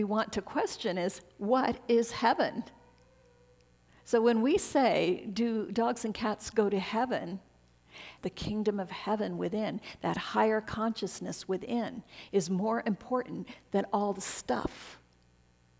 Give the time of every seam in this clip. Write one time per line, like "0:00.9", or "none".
0:08.2